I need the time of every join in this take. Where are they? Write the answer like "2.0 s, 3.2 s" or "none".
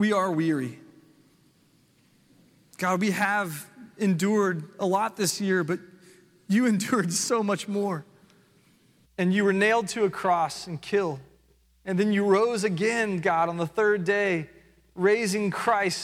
9.0 s, 11.6 s